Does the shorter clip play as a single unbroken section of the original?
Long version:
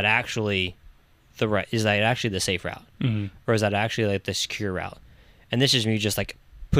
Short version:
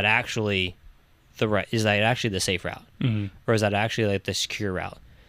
yes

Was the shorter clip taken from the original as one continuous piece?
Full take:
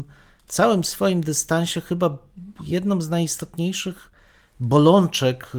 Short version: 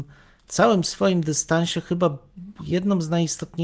yes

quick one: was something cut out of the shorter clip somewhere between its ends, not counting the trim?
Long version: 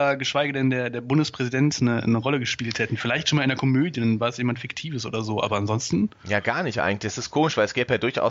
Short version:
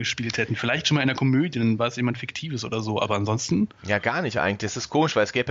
no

